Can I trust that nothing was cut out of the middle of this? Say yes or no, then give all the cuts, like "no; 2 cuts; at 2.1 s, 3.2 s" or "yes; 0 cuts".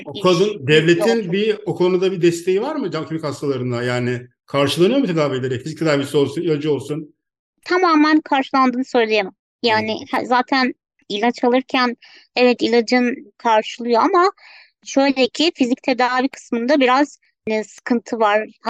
yes; 0 cuts